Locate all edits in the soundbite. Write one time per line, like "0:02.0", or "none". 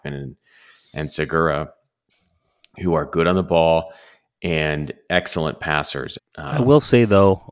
0:06.2